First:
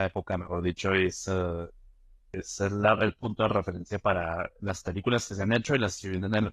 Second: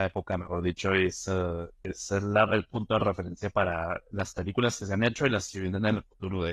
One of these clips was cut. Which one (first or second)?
second